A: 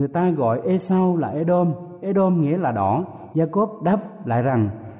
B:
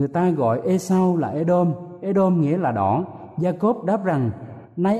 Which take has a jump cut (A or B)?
A